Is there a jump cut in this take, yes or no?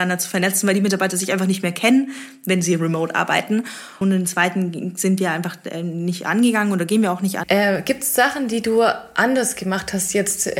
yes